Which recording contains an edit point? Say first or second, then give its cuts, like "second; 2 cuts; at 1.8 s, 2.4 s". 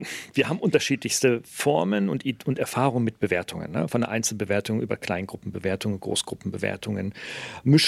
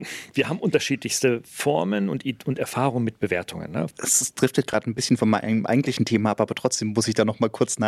second; 1 cut; at 3.9 s